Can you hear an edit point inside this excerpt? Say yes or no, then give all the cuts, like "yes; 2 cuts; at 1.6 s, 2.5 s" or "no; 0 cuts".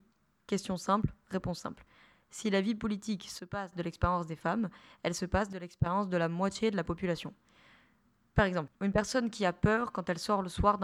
yes; 1 cut; at 8.8 s